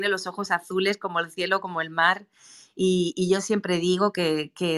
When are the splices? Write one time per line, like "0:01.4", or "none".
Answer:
none